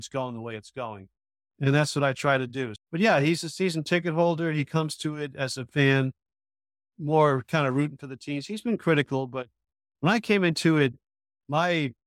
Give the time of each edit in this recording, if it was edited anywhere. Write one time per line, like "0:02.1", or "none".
0:02.8